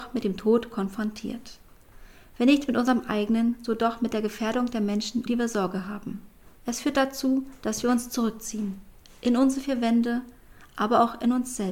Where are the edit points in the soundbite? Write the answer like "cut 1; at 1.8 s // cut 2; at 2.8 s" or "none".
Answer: cut 1; at 5.3 s // cut 2; at 6.6 s